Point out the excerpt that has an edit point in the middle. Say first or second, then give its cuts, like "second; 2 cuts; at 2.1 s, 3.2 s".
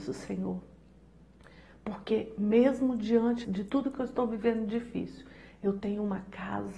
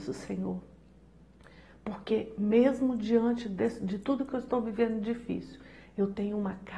first; 1 cut; at 3.4 s